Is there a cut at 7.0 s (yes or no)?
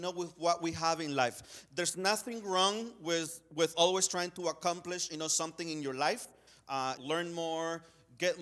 yes